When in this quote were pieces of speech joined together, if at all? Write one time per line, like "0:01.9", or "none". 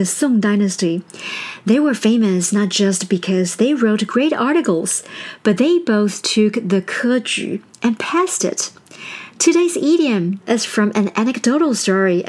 0:10.4